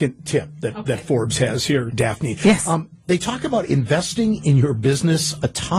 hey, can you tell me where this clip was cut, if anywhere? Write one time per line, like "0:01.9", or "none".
none